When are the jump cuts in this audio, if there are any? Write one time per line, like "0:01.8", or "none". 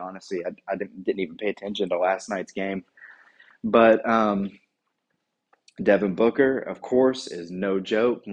none